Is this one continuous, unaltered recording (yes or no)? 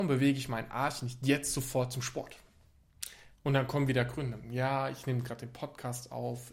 no